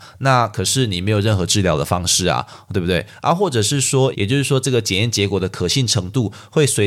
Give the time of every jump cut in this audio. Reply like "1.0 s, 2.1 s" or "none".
4.1 s